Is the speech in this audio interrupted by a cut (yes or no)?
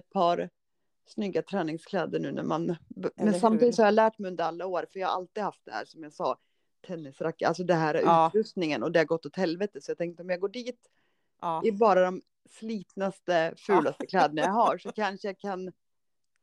no